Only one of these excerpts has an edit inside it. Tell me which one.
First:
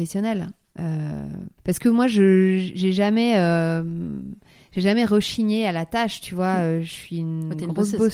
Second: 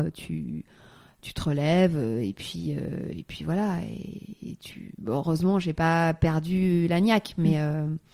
first; 1 cut; at 1.6 s

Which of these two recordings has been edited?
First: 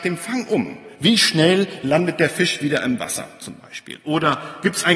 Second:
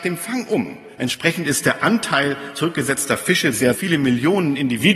second; 2 cuts; at 1.0 s, 3.7 s

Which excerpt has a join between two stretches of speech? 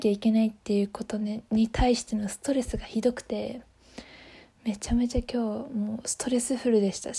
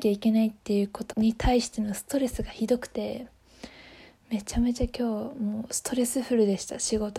second; 1 cut; at 1.1 s

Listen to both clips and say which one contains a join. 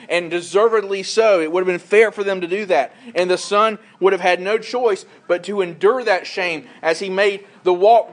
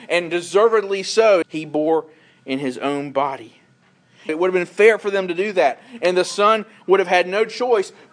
second; 2 cuts; at 1.4 s, 4.3 s

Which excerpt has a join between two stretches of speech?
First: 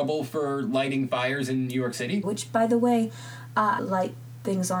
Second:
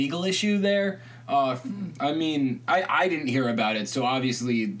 first; 2 cuts; at 2.2 s, 3.8 s

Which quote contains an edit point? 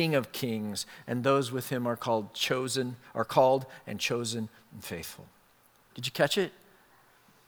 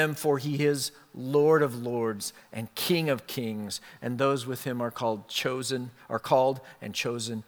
first; 1 cut; at 5.9 s

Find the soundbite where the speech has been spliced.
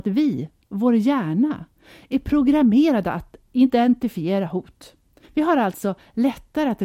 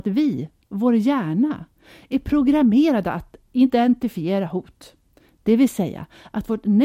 first; 1 cut; at 5.2 s

